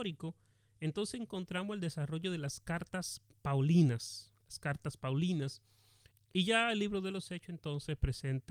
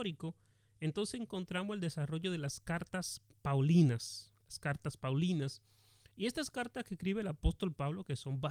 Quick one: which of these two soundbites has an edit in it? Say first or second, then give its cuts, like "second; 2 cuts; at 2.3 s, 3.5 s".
first; 1 cut; at 6.1 s